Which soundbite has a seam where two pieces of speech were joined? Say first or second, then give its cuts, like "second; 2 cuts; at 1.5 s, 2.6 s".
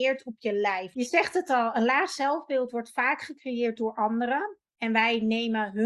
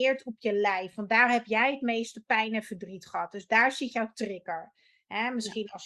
first; 1 cut; at 0.9 s